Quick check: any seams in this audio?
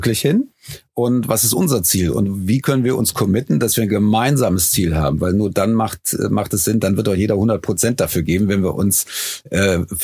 no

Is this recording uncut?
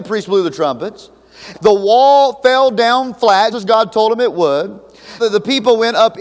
no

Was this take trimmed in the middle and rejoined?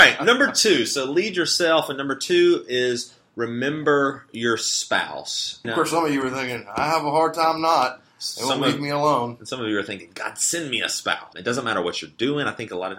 yes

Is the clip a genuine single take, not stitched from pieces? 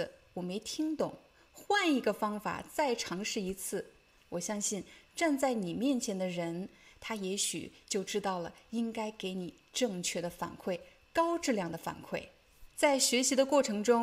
no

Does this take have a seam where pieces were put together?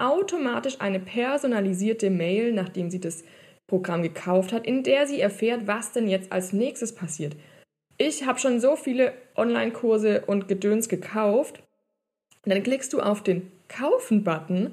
no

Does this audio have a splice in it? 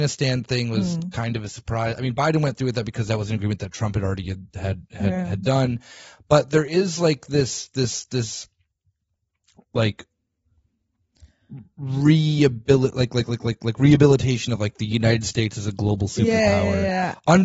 no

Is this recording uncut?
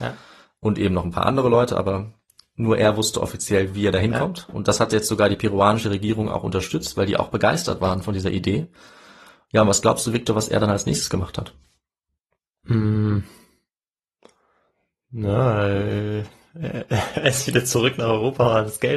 yes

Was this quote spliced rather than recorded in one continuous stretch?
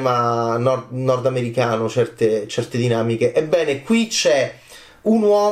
no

